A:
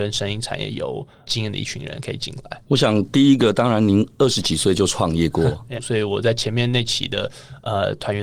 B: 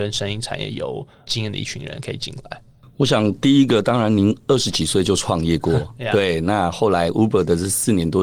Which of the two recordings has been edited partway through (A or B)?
A